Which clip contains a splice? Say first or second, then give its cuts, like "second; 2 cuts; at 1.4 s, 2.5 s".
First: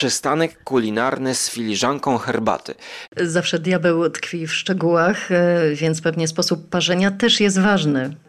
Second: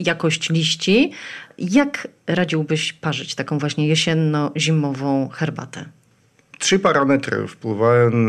first; 1 cut; at 3.1 s